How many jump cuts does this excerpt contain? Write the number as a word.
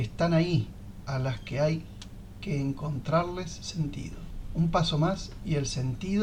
one